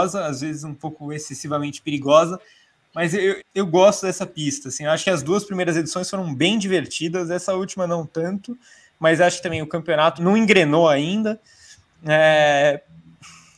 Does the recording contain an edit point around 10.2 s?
yes; 2 cuts; at 3.4 s, 10.2 s

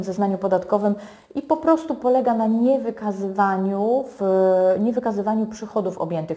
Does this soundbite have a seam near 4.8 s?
no; 0 cuts

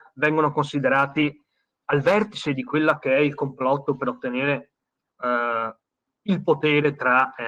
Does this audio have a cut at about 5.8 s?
no; 0 cuts

